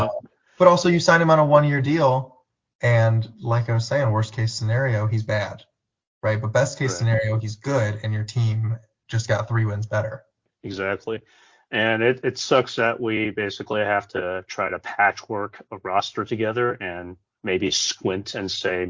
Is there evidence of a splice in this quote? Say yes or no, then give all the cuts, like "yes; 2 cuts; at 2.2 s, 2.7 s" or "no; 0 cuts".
no; 0 cuts